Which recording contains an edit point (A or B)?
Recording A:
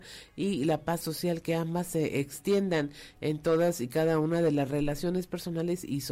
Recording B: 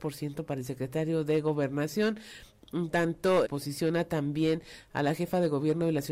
B